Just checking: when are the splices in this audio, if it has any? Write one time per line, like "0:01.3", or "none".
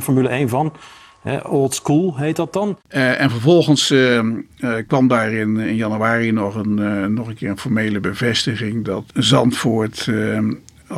none